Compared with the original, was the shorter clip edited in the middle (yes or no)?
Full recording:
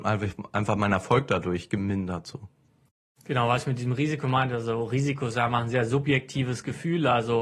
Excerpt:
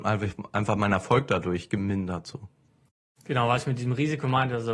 no